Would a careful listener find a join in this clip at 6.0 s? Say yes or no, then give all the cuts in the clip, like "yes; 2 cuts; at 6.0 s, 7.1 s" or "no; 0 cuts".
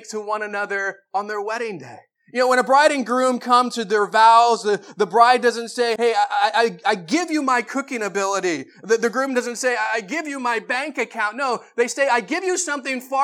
yes; 1 cut; at 6.0 s